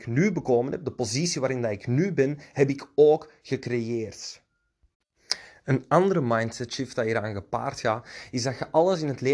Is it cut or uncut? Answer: uncut